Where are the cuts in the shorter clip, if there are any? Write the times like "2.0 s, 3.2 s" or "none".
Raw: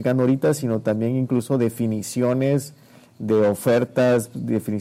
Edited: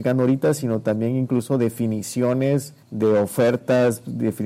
2.8 s